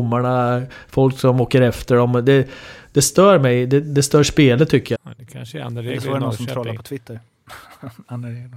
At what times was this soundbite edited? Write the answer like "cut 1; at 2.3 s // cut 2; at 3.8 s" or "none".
cut 1; at 4.9 s